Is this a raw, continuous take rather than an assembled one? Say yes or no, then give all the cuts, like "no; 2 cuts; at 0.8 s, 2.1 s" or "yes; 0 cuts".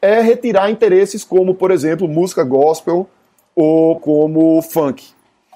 no; 1 cut; at 4.0 s